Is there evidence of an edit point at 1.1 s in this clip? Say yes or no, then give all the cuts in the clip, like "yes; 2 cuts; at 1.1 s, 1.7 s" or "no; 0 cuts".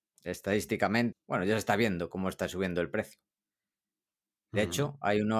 yes; 1 cut; at 1.1 s